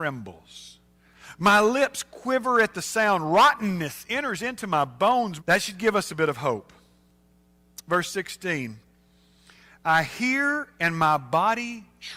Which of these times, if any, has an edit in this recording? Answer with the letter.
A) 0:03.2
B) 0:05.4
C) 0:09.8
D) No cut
B